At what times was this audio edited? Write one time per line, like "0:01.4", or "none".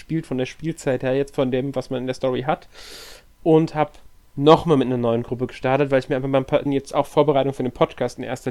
0:06.7